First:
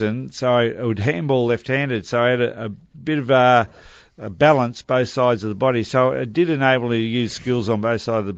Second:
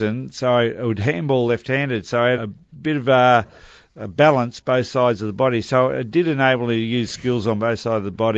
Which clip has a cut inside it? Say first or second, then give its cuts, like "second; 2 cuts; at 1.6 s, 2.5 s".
second; 1 cut; at 2.4 s